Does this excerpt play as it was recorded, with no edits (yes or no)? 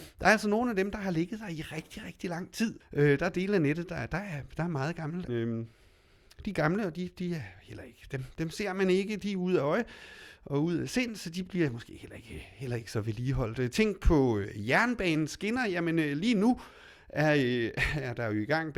no